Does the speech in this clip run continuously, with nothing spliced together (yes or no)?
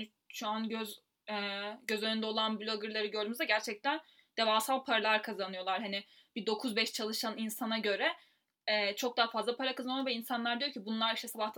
yes